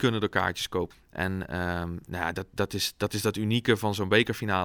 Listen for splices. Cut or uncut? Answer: cut